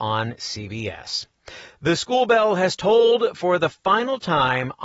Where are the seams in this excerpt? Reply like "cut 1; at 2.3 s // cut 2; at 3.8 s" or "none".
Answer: none